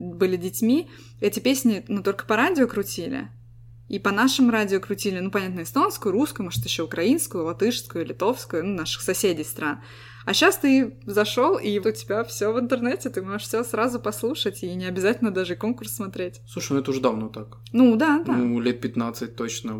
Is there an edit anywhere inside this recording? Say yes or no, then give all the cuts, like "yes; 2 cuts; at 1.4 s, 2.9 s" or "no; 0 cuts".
yes; 1 cut; at 11.8 s